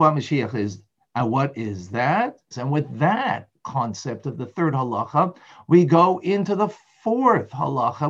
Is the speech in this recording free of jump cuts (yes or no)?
no